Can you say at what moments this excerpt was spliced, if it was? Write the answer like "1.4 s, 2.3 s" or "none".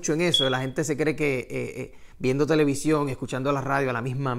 none